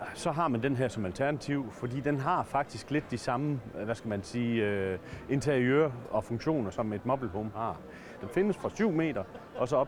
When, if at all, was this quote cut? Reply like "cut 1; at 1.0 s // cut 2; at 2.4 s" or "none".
cut 1; at 6.7 s // cut 2; at 8.2 s